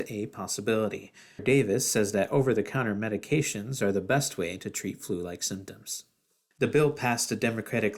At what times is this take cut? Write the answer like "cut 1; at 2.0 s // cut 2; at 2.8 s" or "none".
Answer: cut 1; at 1.4 s // cut 2; at 6.5 s